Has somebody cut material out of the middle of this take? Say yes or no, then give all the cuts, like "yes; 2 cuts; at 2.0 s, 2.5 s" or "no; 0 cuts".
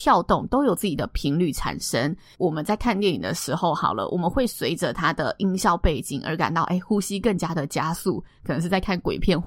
yes; 1 cut; at 2.3 s